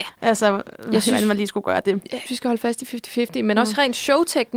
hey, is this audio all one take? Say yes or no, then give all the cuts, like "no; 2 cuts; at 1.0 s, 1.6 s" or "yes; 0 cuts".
no; 1 cut; at 2.3 s